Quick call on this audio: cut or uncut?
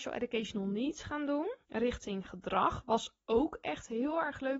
cut